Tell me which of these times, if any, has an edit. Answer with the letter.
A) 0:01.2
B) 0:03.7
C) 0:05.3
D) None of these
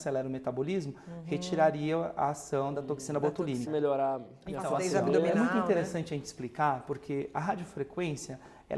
B